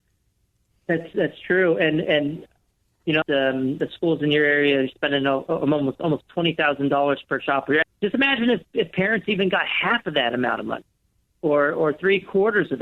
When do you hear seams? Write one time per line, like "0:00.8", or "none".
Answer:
0:03.2
0:07.8

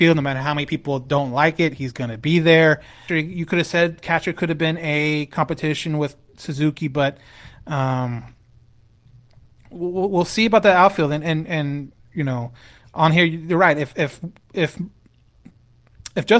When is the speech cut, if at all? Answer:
0:03.1

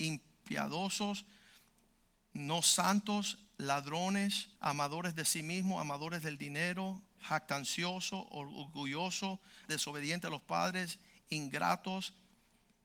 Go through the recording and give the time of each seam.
0:04.6
0:09.6

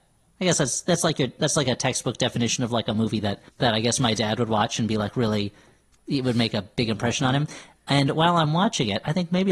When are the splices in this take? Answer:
0:03.5

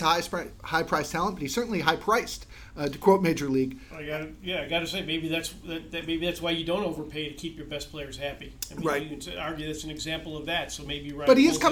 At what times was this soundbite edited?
none

